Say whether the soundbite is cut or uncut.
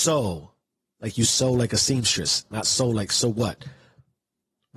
uncut